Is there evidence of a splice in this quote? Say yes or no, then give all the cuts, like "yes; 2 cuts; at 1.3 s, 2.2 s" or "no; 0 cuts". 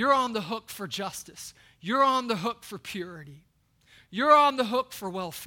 no; 0 cuts